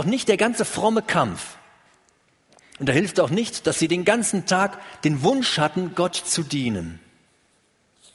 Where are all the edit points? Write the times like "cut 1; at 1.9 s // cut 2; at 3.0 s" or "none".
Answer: cut 1; at 2.8 s